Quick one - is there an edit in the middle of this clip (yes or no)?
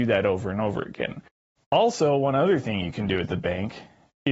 yes